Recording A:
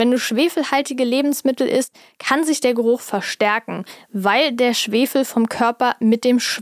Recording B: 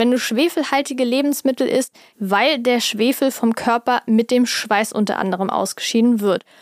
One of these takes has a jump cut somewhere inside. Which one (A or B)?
B